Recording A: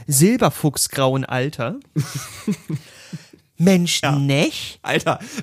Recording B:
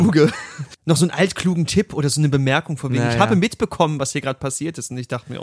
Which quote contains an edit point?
A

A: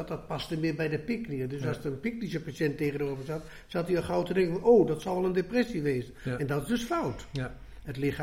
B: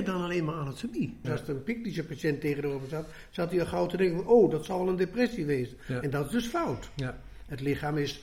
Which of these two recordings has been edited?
B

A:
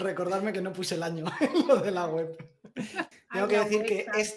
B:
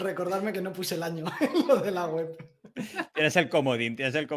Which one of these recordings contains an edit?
A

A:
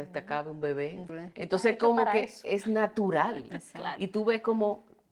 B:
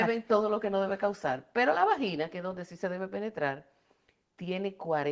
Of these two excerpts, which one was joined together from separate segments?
A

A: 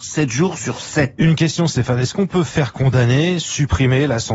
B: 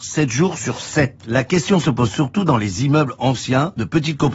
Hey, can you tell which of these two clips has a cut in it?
B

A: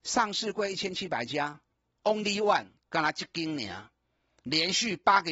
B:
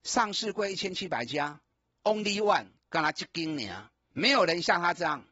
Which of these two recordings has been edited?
B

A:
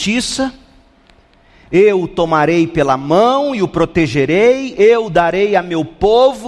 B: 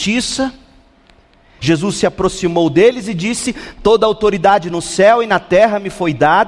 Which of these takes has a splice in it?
B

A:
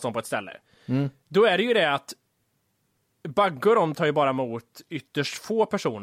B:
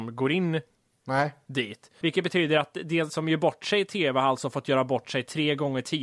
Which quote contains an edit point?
B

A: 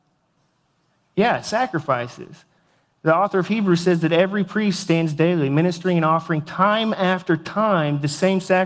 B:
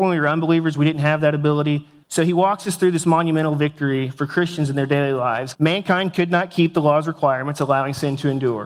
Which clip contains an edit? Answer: B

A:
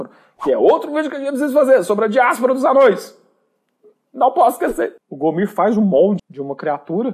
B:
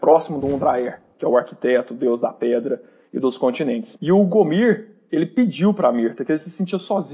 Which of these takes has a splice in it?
A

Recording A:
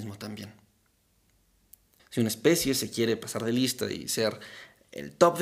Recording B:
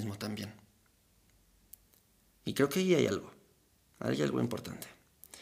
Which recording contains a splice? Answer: A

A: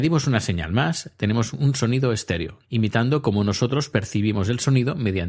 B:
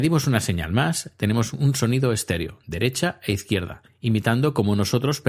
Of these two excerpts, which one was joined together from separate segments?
A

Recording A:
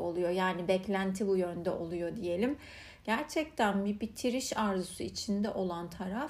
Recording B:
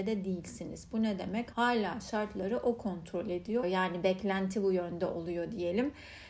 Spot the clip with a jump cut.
B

